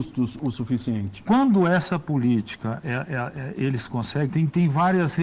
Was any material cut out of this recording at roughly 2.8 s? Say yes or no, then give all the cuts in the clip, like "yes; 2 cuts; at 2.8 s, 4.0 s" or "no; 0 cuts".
yes; 2 cuts; at 2.8 s, 4.3 s